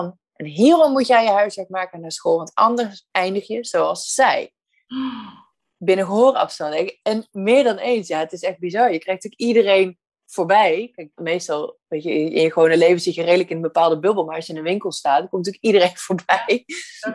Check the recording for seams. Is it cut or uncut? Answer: cut